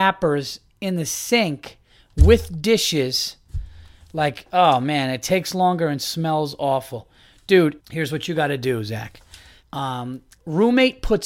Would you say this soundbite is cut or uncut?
cut